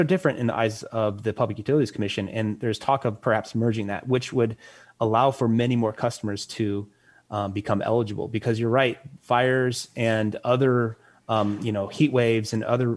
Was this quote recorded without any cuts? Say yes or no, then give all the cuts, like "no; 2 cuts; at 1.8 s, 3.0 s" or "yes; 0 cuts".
yes; 0 cuts